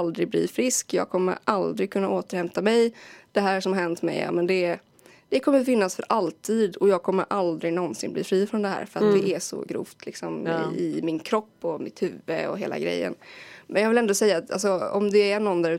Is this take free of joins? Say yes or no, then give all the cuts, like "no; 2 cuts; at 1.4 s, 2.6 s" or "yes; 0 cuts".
yes; 0 cuts